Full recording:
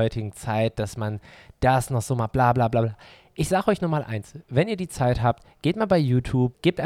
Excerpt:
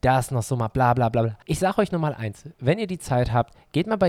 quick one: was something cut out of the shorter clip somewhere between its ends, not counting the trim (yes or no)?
yes